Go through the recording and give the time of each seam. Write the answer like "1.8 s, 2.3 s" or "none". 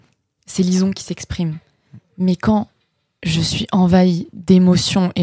none

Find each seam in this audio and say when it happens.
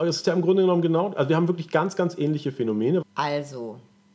3.0 s

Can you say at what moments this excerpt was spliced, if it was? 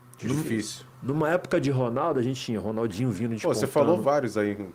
none

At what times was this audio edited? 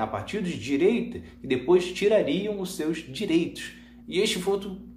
4.0 s

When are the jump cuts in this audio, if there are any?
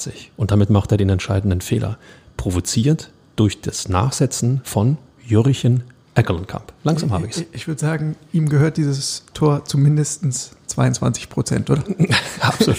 5.2 s

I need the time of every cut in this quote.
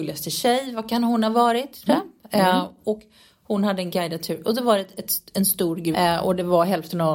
1.9 s, 5.9 s

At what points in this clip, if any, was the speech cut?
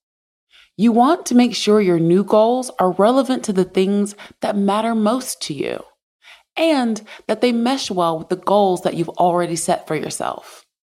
none

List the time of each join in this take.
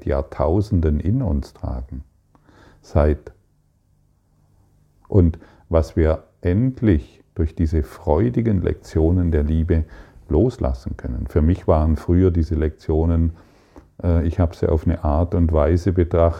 none

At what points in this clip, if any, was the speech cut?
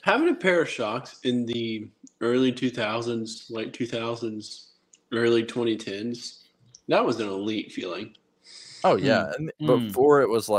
none

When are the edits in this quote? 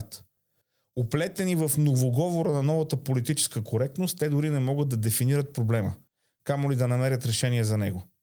none

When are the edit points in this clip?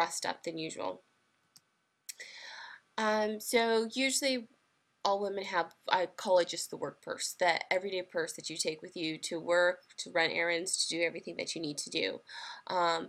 none

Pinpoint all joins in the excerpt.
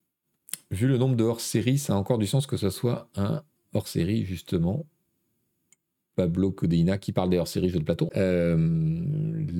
8.1 s

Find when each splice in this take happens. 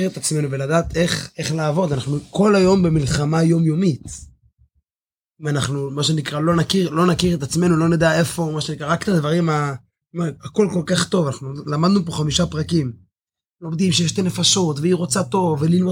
10.0 s

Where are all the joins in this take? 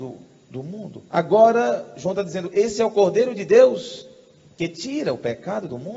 1.1 s

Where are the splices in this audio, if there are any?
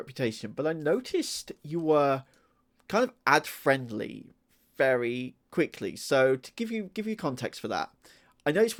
none

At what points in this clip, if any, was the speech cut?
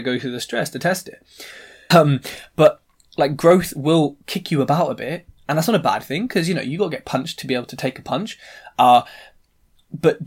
1.9 s

